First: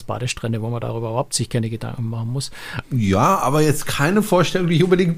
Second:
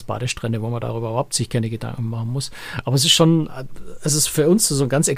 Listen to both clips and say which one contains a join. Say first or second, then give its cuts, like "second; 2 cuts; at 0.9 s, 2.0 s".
first; 1 cut; at 2.8 s